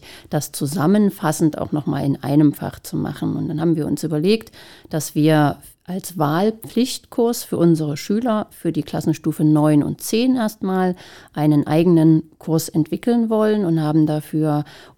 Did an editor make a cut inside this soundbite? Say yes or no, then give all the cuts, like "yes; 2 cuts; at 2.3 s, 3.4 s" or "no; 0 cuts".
no; 0 cuts